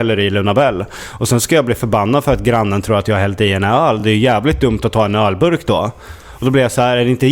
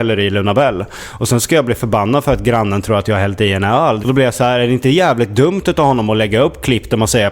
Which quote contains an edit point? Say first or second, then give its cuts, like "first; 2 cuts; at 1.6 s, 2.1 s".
second; 1 cut; at 4.0 s